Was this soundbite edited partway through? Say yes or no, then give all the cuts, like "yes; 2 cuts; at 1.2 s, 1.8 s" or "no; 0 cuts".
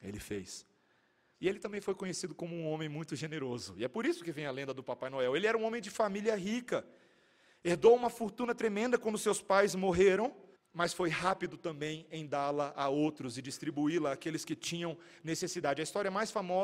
yes; 2 cuts; at 1.3 s, 10.6 s